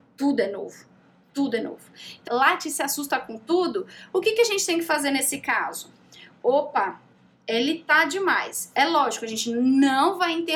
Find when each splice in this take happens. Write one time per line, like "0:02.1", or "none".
0:02.3